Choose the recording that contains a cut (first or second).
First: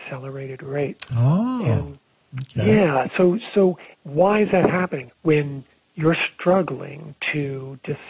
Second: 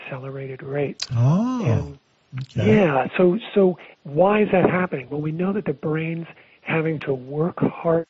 first